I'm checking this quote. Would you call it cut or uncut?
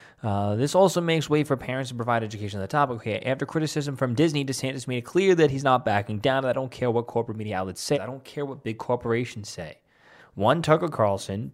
cut